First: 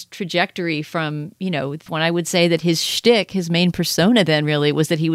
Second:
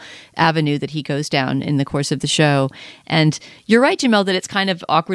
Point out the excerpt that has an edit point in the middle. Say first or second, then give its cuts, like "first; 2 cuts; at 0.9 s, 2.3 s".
first; 1 cut; at 1.9 s